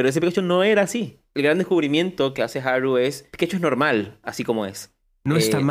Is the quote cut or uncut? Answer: uncut